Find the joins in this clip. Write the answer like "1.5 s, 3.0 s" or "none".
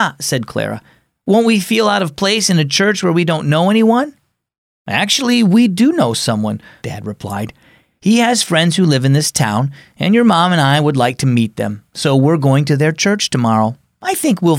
6.8 s